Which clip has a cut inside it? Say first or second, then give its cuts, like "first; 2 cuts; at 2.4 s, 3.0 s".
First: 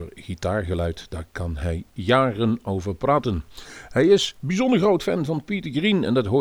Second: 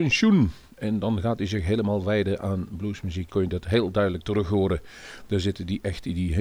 second; 1 cut; at 3.3 s